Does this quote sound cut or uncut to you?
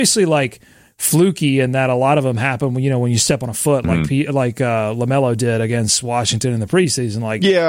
uncut